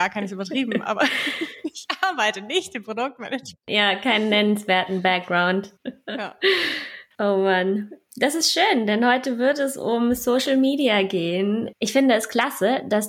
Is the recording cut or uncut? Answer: cut